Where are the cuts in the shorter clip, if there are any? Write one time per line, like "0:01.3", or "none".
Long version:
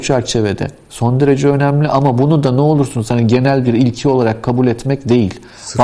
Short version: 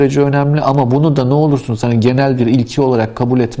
none